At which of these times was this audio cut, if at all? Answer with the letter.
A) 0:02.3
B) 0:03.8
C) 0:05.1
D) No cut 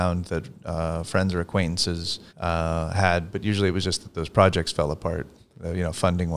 A